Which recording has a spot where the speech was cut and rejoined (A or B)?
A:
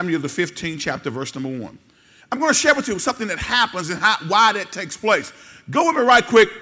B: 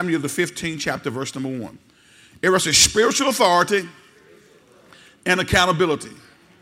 A